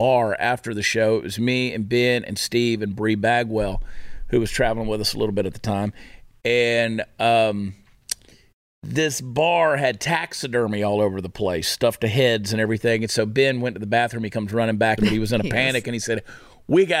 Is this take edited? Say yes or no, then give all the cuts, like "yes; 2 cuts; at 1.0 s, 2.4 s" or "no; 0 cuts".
yes; 1 cut; at 15.0 s